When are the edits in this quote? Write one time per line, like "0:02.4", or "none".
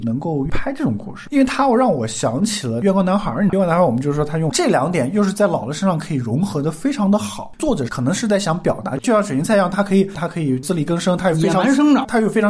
0:03.5
0:04.5